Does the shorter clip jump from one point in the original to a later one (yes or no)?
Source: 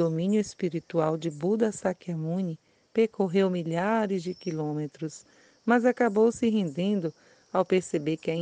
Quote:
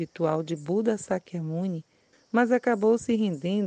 yes